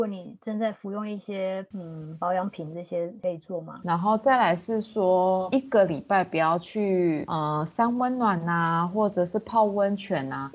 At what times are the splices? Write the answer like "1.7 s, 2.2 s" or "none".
3.8 s